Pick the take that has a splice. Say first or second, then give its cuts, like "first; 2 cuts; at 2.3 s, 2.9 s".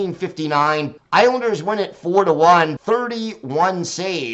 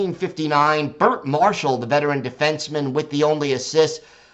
first; 2 cuts; at 1.0 s, 2.8 s